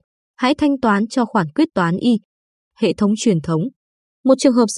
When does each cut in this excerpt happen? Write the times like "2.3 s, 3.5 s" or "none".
none